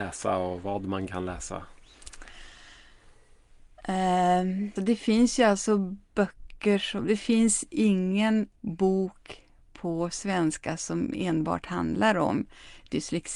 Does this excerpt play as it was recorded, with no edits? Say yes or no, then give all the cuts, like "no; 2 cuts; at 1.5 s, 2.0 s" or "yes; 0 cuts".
no; 2 cuts; at 4.8 s, 8.6 s